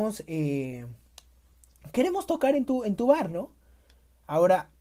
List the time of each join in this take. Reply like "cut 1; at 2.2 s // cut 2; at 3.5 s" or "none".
none